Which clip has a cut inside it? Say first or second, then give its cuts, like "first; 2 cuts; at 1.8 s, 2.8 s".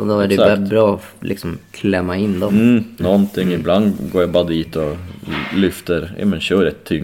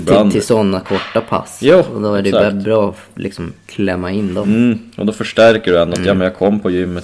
first; 1 cut; at 3.0 s